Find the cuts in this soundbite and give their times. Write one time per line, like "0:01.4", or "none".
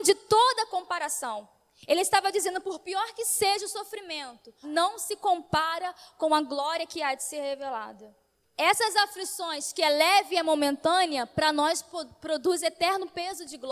0:04.6
0:08.4